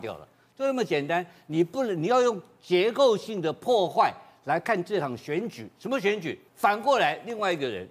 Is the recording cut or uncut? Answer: cut